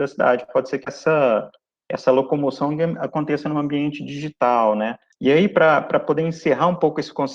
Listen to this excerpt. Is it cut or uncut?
cut